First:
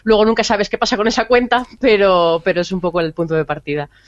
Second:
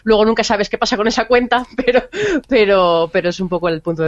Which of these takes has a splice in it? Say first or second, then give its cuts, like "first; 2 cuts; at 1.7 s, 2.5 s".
first; 1 cut; at 1.8 s